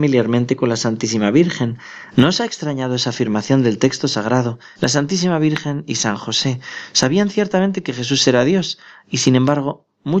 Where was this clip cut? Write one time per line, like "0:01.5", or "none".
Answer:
0:02.1
0:04.8